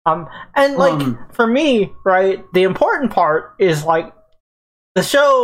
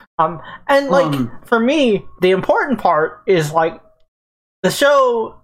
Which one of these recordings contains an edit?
second; 1 cut; at 2.1 s

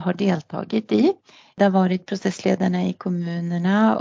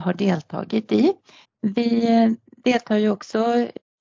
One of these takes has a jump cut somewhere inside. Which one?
second; 1 cut; at 1.4 s

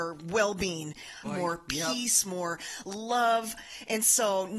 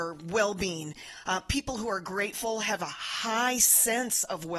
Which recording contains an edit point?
first; 1 cut; at 1.2 s

